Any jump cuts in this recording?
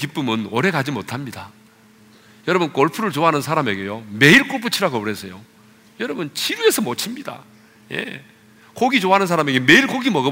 no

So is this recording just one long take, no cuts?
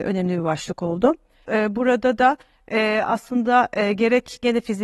no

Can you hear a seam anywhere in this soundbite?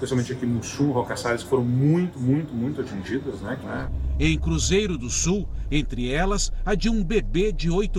yes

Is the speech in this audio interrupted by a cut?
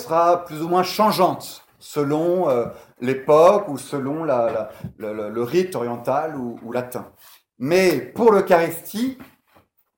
no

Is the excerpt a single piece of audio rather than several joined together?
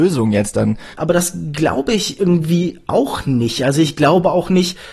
no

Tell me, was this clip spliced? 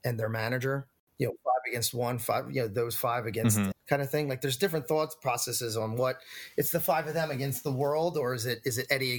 yes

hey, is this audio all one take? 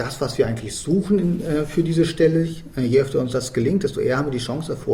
yes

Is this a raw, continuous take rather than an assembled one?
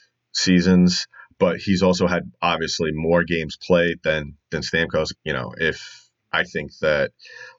no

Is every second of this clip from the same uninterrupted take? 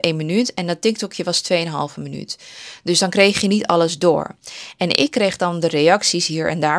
yes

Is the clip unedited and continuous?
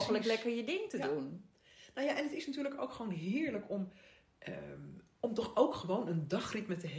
yes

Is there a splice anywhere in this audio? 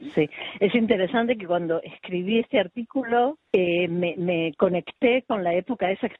yes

